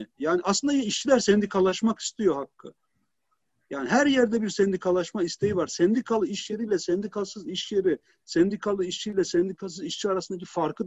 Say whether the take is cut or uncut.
uncut